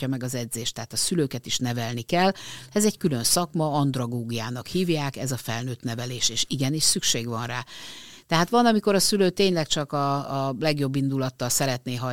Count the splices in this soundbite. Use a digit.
0